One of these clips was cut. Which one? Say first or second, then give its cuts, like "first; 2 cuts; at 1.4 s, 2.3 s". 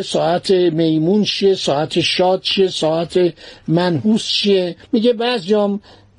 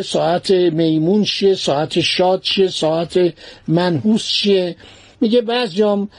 first; 1 cut; at 4.9 s